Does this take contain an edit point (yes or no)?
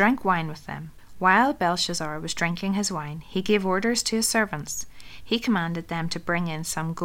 no